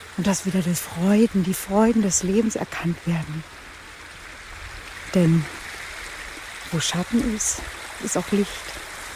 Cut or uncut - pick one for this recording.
uncut